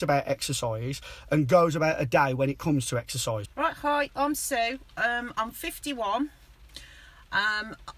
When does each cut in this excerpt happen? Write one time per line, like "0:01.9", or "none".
0:03.4